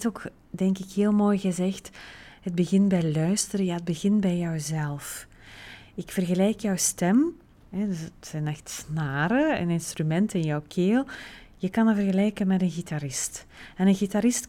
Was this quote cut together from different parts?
no; 0 cuts

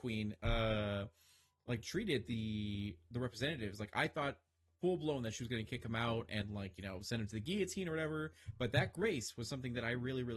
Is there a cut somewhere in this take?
no; 0 cuts

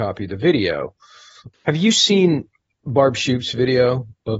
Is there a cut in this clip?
yes; 1 cut; at 1.5 s

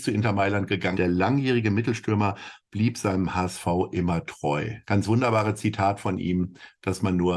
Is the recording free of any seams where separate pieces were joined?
no; 2 cuts; at 0.9 s, 4.8 s

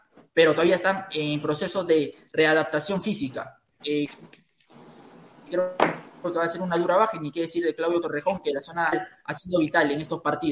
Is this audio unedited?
no; 1 cut; at 3.8 s

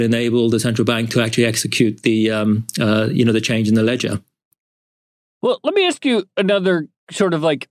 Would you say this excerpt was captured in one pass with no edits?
yes; 0 cuts

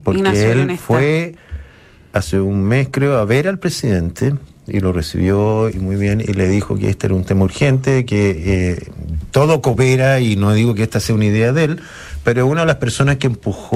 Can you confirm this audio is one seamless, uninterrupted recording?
yes; 0 cuts

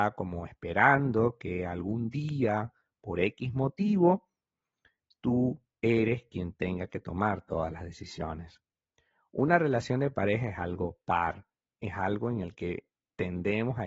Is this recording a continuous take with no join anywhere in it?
yes; 0 cuts

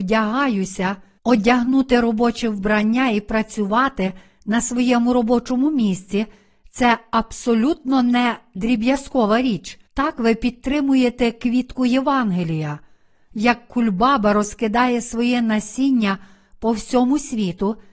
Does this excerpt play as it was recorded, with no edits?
no; 2 cuts; at 1.2 s, 9.9 s

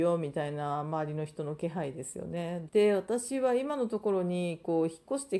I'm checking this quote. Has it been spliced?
yes; 1 cut; at 2.7 s

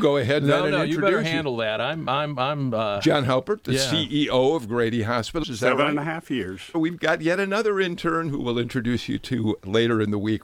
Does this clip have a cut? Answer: yes; 2 cuts; at 5.4 s, 6.7 s

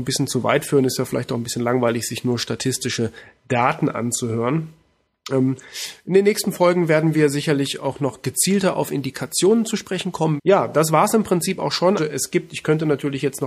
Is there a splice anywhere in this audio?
yes; 2 cuts; at 10.4 s, 12.0 s

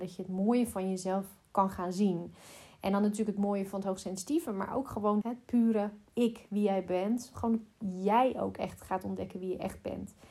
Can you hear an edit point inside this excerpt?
yes; 1 cut; at 5.2 s

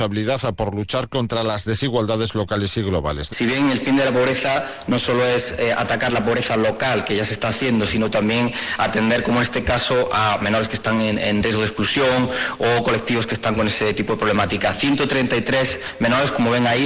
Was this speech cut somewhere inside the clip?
yes; 1 cut; at 3.3 s

